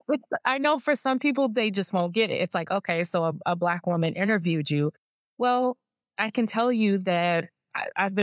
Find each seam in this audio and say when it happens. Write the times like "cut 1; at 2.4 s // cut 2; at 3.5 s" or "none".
none